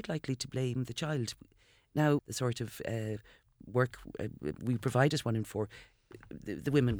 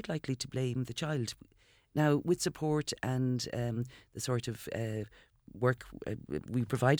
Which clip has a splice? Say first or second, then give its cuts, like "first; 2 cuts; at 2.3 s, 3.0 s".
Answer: first; 1 cut; at 2.2 s